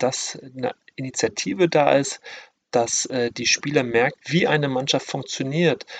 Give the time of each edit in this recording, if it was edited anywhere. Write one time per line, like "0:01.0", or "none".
0:04.2